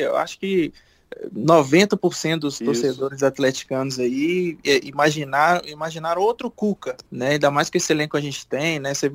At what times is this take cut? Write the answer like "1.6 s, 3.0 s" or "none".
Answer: 7.1 s